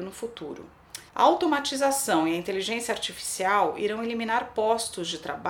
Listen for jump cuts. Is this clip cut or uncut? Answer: cut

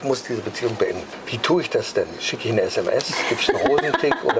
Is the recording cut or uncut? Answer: uncut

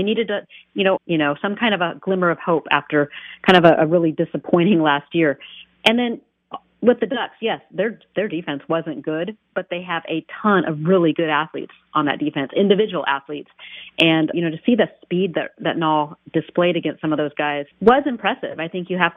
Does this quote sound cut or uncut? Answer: cut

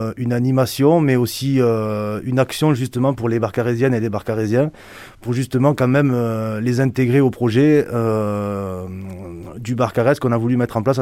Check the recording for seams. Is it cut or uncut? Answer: uncut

